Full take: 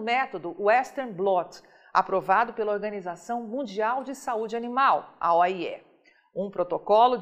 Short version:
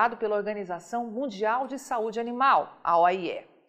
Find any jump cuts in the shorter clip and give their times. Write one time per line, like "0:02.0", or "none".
none